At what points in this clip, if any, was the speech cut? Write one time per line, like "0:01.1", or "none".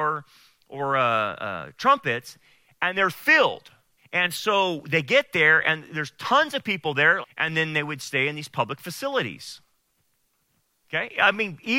0:04.0
0:07.2